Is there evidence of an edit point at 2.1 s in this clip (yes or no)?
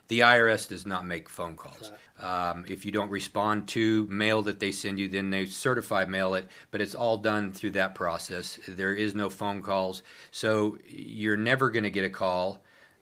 yes